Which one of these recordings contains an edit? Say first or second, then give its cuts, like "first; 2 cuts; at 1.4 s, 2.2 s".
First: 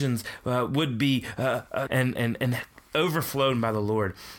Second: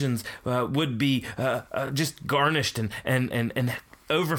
first; 1 cut; at 1.9 s